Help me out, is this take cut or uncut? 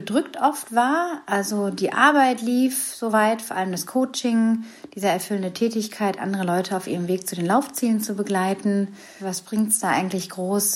cut